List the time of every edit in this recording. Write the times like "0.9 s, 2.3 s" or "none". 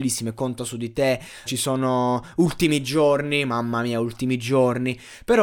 1.5 s